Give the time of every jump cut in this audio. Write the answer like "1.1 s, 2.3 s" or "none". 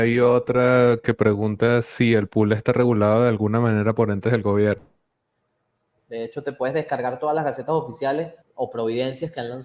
6.0 s, 8.4 s

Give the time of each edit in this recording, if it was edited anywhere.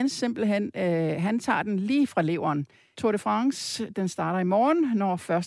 2.9 s

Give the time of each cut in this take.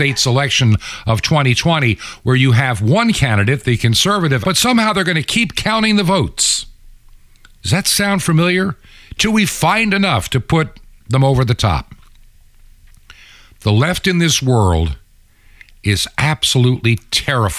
4.4 s

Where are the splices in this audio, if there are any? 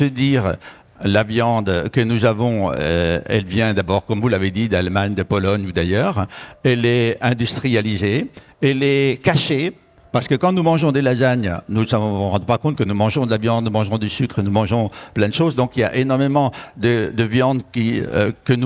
none

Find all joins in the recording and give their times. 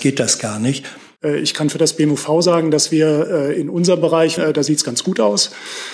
1.2 s, 4.4 s

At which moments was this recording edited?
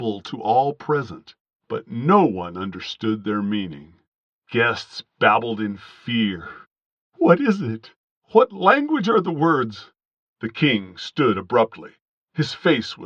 8.1 s

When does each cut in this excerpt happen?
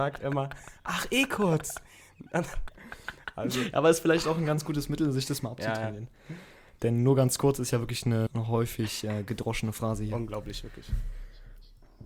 2.7 s, 8.3 s

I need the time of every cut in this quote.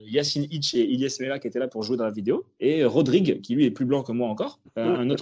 none

